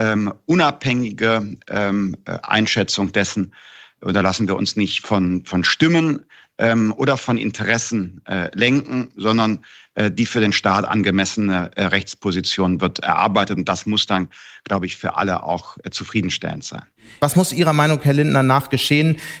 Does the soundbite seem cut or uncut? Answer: uncut